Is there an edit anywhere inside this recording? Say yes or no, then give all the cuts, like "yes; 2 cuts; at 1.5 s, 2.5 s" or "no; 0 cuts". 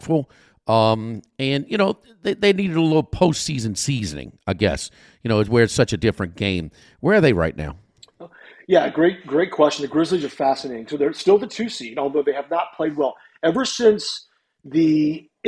no; 0 cuts